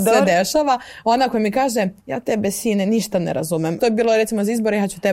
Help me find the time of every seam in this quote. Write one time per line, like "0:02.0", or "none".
0:02.0
0:03.8